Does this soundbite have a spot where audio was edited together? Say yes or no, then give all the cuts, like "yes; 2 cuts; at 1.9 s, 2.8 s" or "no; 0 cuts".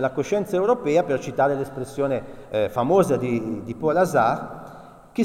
no; 0 cuts